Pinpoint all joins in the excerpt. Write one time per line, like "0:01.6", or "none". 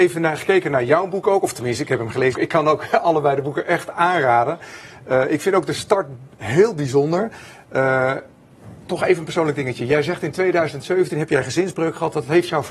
0:02.3